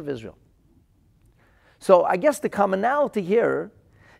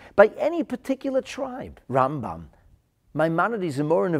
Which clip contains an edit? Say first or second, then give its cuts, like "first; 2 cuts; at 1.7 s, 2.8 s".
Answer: second; 1 cut; at 1.8 s